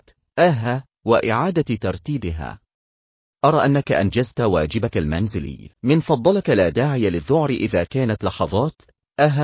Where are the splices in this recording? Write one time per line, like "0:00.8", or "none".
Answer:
0:03.3
0:05.7